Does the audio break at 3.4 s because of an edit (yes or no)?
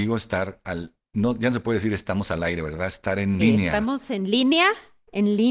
yes